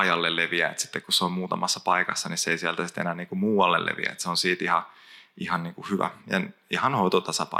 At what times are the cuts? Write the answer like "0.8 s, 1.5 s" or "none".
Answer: none

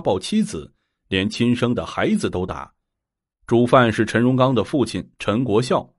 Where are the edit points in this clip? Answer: 3.3 s

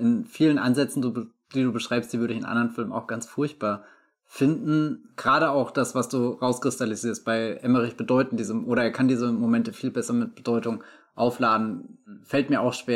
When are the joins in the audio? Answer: none

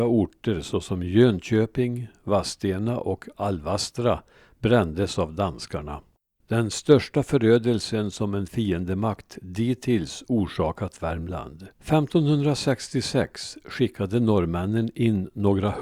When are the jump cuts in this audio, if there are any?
6.4 s, 11.7 s

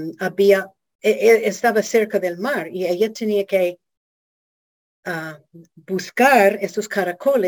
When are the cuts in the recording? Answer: none

